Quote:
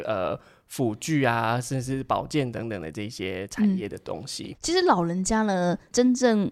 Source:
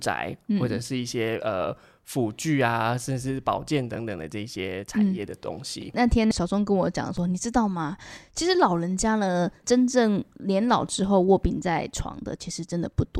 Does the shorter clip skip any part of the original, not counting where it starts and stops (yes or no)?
yes